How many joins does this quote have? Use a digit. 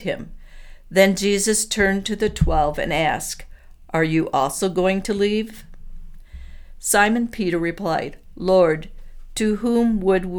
0